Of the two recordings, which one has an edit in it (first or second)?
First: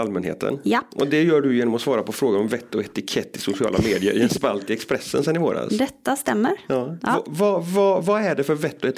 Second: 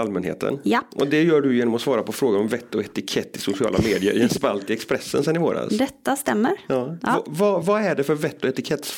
second